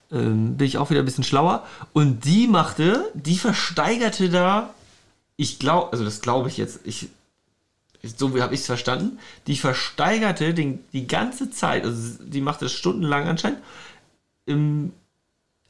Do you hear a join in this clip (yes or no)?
no